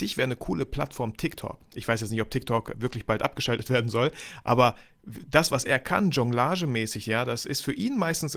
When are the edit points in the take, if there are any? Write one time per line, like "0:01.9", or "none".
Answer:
0:02.7